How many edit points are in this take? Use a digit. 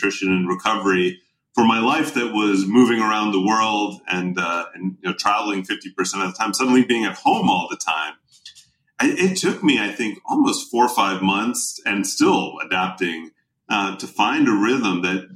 0